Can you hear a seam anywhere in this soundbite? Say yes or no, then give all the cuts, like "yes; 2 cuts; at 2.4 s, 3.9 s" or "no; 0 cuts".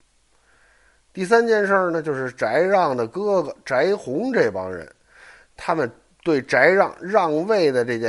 no; 0 cuts